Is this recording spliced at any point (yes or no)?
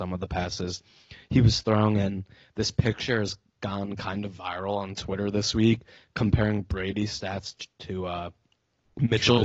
no